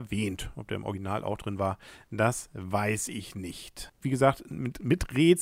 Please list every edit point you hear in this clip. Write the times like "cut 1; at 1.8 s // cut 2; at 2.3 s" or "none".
cut 1; at 4.0 s